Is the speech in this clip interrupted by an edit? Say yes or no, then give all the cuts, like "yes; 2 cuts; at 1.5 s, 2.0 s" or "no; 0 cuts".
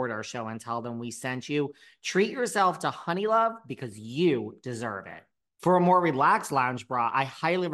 yes; 1 cut; at 5.6 s